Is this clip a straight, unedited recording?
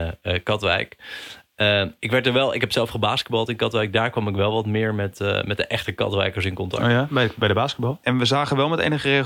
no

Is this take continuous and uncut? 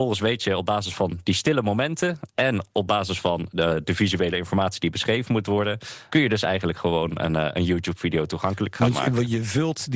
no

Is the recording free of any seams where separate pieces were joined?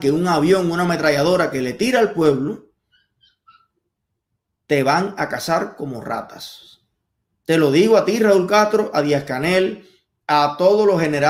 no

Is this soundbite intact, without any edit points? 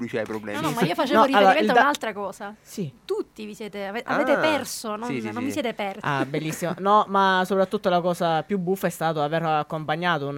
no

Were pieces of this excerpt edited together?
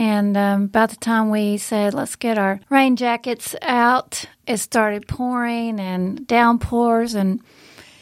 yes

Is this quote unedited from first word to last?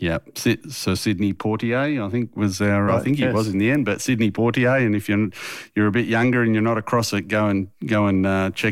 no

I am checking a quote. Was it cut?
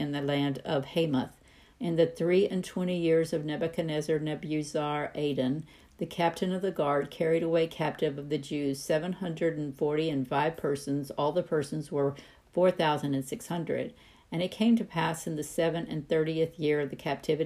yes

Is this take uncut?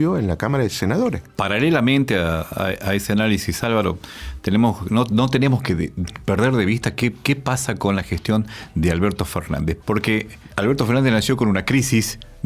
no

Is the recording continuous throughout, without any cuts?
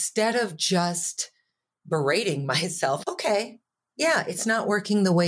no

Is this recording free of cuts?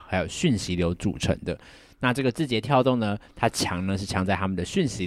yes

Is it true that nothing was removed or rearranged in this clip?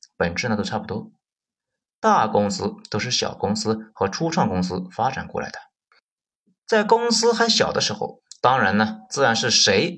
yes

